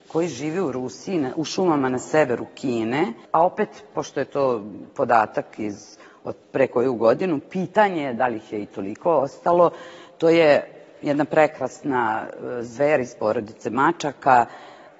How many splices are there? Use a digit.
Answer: 1